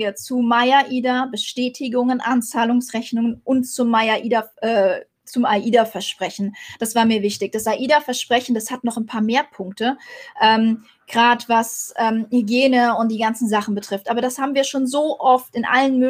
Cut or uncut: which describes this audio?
uncut